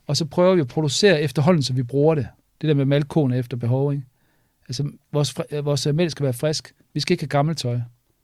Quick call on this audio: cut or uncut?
uncut